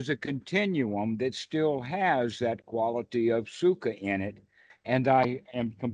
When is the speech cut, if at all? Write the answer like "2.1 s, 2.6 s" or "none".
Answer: 4.7 s